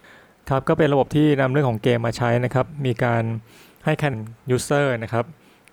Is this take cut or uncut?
cut